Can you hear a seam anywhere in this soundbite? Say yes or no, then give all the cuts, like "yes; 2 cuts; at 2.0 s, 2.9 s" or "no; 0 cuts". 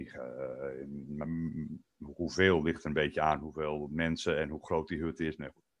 yes; 1 cut; at 1.2 s